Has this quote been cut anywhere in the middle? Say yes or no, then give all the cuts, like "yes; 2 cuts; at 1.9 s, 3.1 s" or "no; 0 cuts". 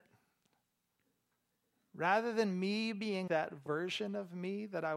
yes; 1 cut; at 3.3 s